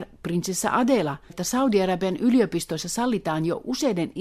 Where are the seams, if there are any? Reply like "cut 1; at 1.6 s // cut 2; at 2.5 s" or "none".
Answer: cut 1; at 1.3 s

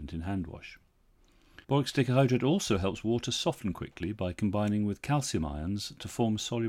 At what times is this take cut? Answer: cut 1; at 1.6 s

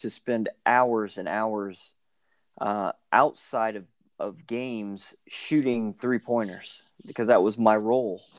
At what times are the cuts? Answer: none

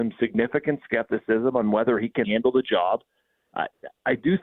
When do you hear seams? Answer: cut 1; at 2.2 s

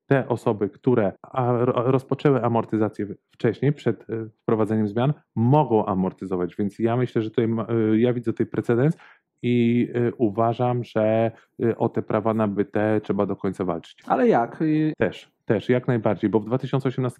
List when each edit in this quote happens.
cut 1; at 1.2 s // cut 2; at 14.9 s

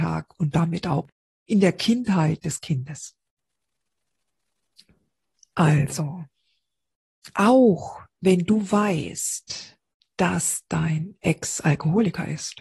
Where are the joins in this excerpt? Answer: none

